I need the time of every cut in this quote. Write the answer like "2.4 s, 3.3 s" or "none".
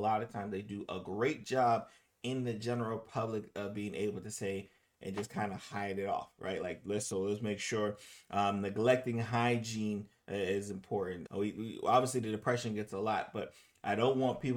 11.3 s